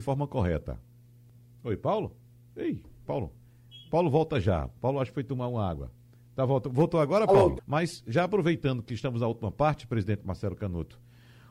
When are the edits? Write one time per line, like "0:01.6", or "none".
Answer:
0:07.6